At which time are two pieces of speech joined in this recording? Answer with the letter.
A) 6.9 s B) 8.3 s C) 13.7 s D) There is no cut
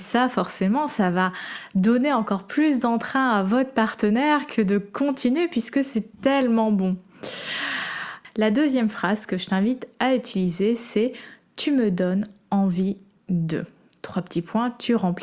D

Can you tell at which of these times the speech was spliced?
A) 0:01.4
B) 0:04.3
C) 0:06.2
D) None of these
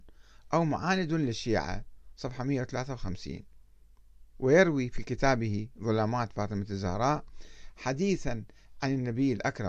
B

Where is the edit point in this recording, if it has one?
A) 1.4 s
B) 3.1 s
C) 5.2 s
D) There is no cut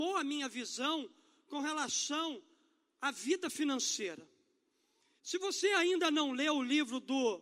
C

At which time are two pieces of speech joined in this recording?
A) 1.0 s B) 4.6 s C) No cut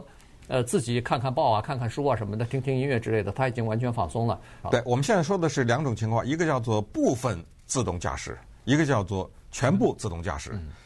B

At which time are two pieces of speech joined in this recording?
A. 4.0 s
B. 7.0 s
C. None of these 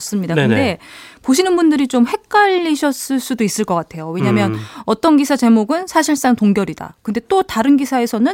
C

